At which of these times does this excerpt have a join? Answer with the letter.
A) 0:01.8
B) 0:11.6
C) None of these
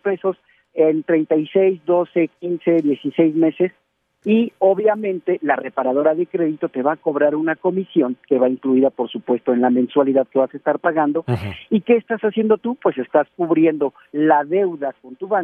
C